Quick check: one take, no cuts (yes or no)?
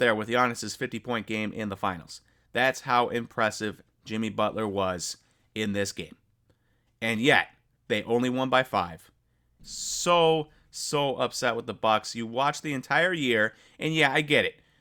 no